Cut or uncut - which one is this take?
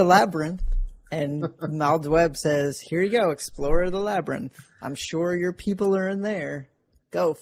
uncut